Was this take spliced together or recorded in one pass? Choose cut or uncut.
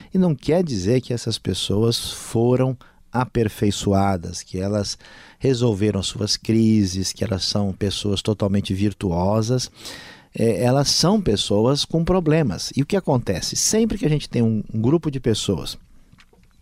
uncut